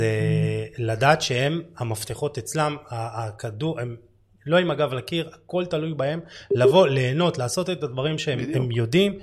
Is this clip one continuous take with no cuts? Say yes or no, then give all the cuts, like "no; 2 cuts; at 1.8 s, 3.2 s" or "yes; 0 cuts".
yes; 0 cuts